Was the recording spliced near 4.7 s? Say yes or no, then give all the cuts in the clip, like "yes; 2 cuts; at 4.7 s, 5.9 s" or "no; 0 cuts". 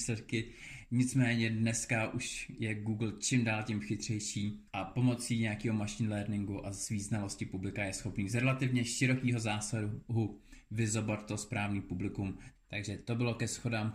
yes; 2 cuts; at 4.7 s, 12.6 s